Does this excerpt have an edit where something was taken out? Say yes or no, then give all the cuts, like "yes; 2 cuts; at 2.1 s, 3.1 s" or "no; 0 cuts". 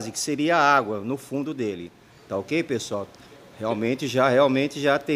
no; 0 cuts